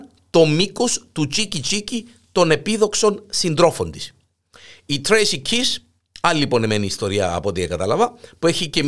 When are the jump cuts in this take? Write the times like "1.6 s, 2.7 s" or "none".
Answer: none